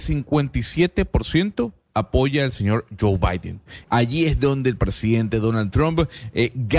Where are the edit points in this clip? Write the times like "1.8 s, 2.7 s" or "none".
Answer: 3.8 s

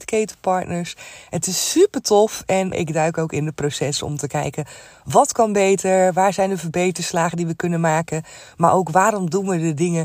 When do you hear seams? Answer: 2.7 s

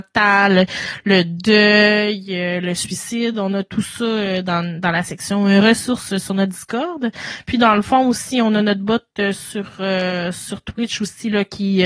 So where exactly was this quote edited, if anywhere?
none

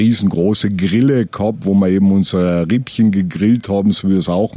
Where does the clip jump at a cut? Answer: none

